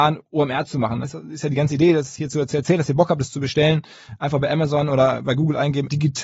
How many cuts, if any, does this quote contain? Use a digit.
1